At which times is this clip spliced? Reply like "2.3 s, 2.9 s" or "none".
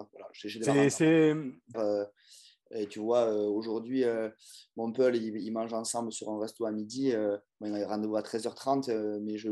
1.7 s